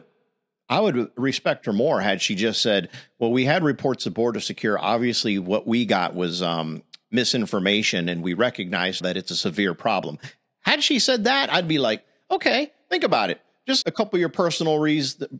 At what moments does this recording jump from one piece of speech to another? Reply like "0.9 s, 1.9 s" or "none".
9.0 s, 13.8 s